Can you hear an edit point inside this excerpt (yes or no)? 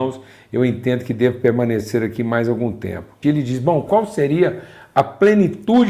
yes